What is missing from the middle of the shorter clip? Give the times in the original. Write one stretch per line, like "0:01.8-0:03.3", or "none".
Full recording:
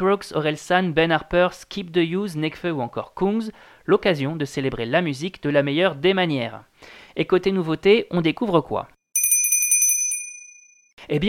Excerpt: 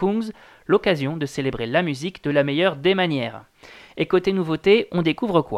none